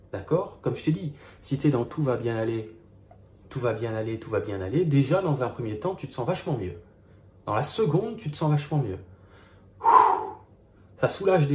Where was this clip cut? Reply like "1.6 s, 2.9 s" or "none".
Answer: none